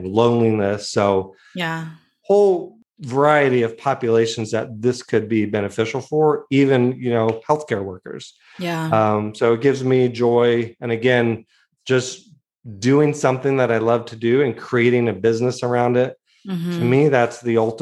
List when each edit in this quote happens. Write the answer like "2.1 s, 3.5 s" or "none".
none